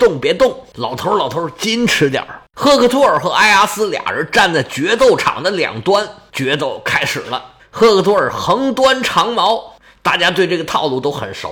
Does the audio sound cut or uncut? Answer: cut